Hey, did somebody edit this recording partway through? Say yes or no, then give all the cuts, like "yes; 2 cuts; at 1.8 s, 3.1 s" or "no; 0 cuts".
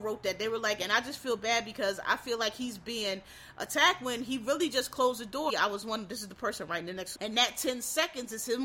yes; 2 cuts; at 5.5 s, 7.2 s